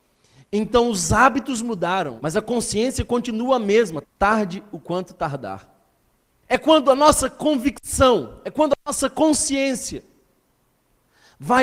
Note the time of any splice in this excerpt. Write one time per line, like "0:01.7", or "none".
0:02.2
0:04.0
0:06.4